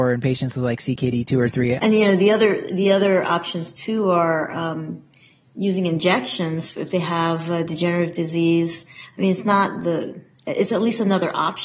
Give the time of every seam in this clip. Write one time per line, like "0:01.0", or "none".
0:01.8